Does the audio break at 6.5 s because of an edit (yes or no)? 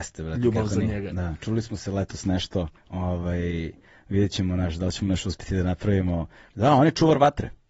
yes